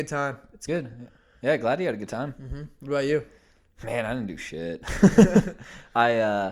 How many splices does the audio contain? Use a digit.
0